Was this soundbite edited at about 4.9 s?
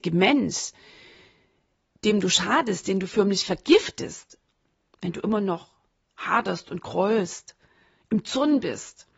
no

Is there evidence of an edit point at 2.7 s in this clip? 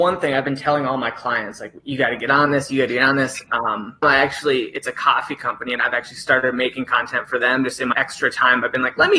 no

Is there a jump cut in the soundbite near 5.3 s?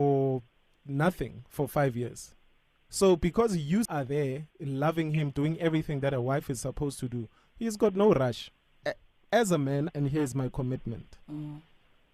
no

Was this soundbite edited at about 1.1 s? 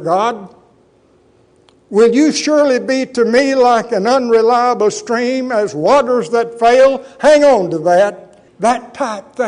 no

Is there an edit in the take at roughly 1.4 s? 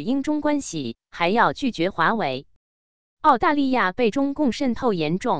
no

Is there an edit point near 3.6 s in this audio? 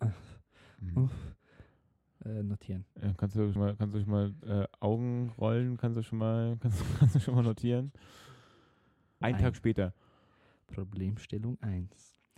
yes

